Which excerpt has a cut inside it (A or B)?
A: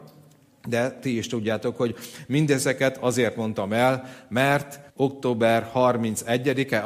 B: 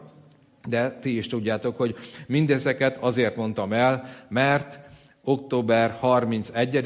A